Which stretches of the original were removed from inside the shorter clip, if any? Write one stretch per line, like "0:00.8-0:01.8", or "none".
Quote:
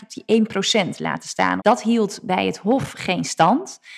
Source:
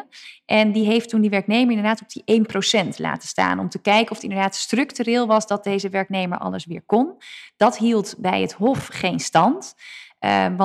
0:03.6-0:07.5